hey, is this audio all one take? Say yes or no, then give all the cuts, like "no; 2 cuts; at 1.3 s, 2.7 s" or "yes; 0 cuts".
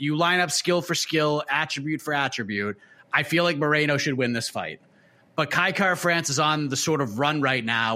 yes; 0 cuts